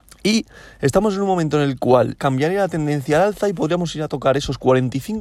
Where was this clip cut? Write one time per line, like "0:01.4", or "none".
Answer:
0:02.2